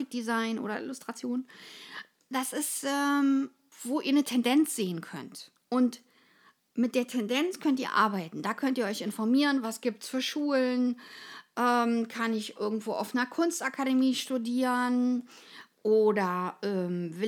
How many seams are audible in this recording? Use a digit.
1